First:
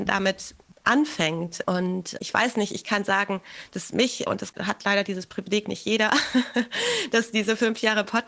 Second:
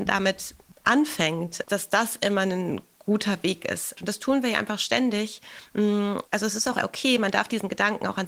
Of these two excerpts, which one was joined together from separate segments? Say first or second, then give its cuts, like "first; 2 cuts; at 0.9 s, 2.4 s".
second; 2 cuts; at 1.6 s, 4.0 s